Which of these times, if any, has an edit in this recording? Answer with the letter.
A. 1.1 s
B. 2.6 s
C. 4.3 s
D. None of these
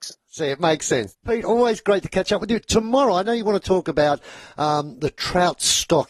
A